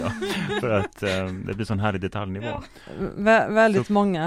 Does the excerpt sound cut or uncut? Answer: uncut